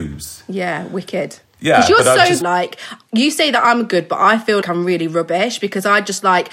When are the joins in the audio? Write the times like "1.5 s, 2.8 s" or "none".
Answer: 2.4 s, 4.6 s